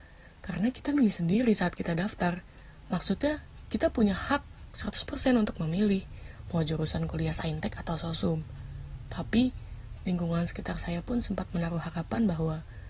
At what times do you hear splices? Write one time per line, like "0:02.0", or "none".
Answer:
0:10.0